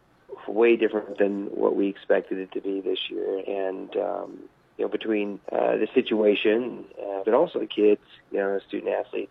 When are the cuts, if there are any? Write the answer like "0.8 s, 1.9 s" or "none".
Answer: 3.4 s, 5.4 s, 7.2 s